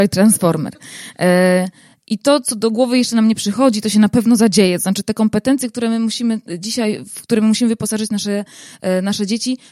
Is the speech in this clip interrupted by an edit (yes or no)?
no